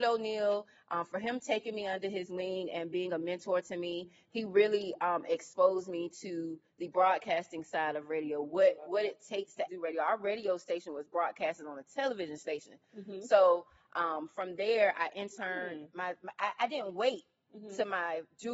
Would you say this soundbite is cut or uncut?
cut